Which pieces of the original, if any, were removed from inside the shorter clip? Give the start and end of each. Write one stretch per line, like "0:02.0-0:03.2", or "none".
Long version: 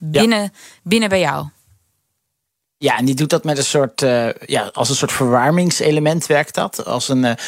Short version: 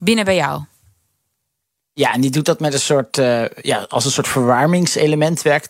none